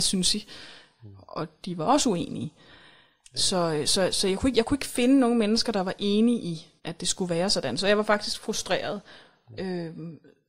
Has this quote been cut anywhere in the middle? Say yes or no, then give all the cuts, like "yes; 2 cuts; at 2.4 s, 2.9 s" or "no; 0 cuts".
yes; 1 cut; at 6.8 s